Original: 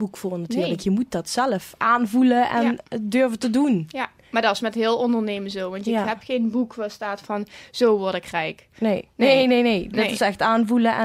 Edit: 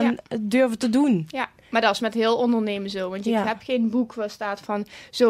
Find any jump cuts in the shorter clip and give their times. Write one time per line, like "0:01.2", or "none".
none